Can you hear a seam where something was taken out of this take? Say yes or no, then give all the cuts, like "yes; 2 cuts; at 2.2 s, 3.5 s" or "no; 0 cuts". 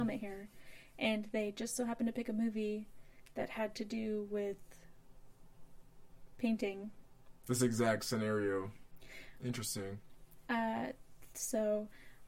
no; 0 cuts